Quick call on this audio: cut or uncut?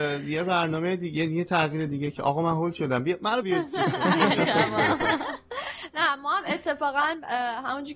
cut